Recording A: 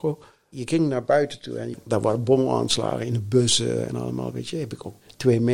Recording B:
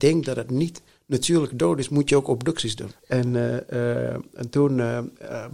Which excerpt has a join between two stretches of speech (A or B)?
B